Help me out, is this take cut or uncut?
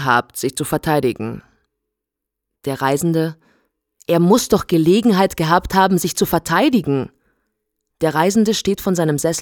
uncut